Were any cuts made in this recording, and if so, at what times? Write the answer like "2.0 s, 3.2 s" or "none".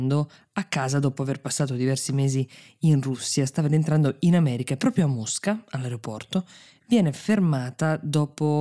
none